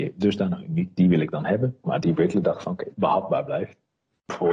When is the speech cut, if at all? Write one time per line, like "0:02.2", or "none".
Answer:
0:01.8
0:02.9

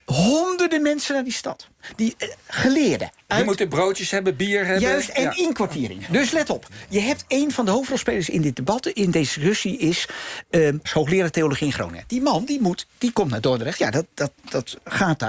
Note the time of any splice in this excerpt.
0:10.9

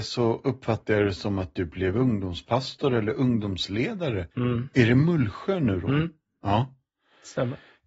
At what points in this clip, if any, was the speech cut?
0:04.3

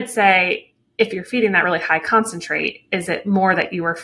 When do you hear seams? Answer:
none

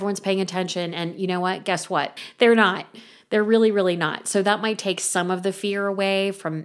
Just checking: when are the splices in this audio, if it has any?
0:02.2

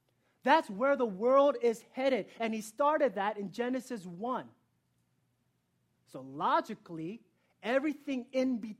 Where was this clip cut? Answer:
none

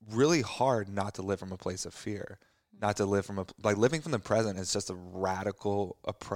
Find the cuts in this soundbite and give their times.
none

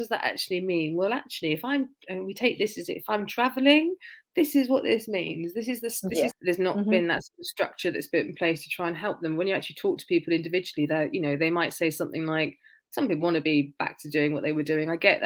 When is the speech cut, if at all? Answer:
0:06.3
0:13.2

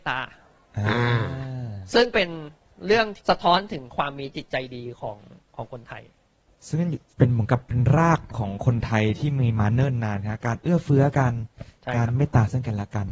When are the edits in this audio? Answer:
0:03.2

